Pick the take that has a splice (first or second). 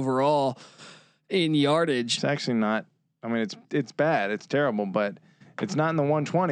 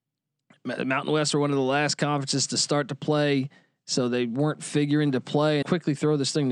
second